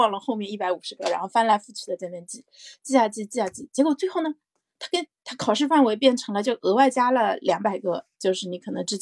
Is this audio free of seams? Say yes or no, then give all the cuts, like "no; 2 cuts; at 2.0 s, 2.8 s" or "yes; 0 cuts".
yes; 0 cuts